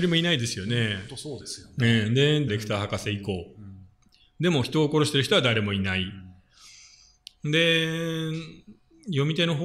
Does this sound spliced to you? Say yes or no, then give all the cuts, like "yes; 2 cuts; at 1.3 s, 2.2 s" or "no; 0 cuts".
yes; 1 cut; at 2.5 s